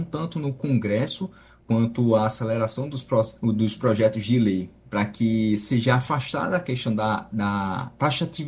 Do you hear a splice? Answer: no; 0 cuts

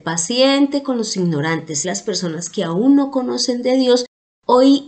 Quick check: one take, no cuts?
no; 1 cut; at 1.8 s

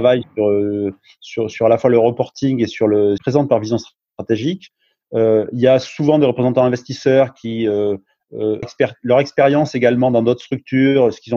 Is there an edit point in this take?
yes; 2 cuts; at 3.2 s, 8.6 s

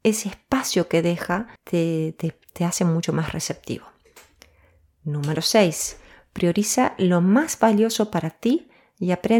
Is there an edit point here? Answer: yes; 1 cut; at 1.6 s

